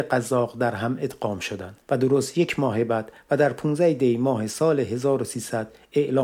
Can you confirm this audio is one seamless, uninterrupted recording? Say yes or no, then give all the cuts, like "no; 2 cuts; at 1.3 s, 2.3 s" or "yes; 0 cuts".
no; 1 cut; at 1.8 s